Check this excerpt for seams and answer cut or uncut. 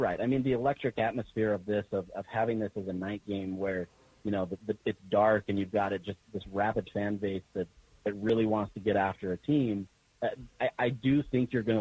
cut